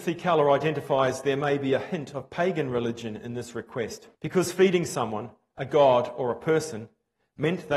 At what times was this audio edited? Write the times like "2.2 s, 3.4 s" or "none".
4.1 s